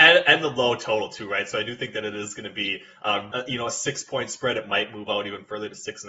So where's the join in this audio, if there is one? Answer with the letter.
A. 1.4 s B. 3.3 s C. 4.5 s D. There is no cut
B